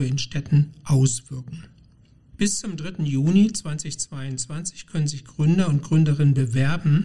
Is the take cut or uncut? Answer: uncut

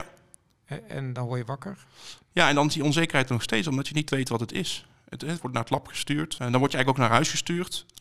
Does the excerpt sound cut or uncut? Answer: uncut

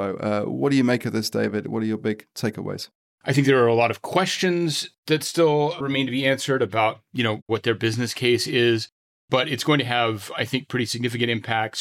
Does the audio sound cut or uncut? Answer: cut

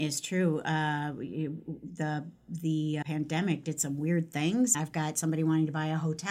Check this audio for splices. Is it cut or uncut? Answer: cut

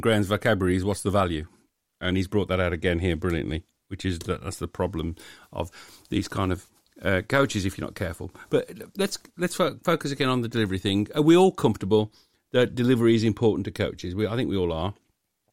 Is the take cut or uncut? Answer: uncut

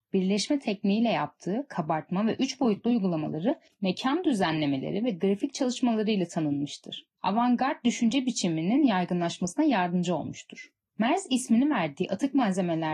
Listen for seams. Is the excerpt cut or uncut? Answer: uncut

